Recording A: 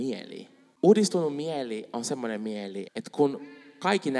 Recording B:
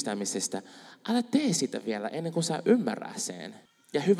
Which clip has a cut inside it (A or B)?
A